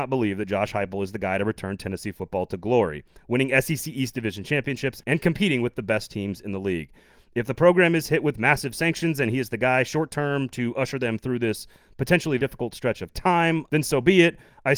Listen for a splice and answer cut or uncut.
cut